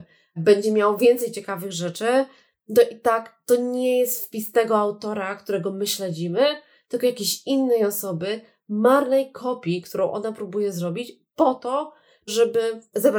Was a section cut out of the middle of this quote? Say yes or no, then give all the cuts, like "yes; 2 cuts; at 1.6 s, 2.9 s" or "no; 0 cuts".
no; 0 cuts